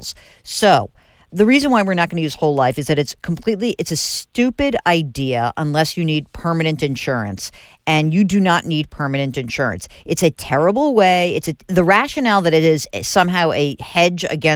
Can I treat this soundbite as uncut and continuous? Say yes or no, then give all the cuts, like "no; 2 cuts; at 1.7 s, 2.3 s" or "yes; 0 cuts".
yes; 0 cuts